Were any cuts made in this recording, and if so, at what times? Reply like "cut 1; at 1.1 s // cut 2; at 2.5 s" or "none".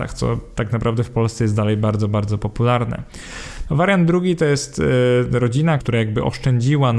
cut 1; at 3.6 s // cut 2; at 5.8 s